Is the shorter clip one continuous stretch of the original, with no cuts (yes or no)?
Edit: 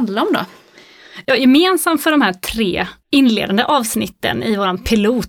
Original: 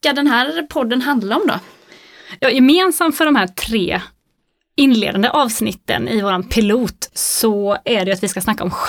no